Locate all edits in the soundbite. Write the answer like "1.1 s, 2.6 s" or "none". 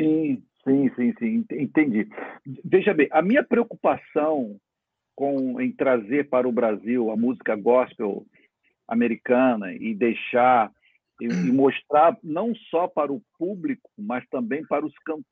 none